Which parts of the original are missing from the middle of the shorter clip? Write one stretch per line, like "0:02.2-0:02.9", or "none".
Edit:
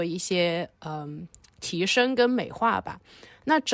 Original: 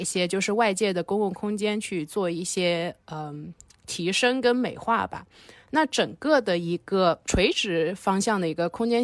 none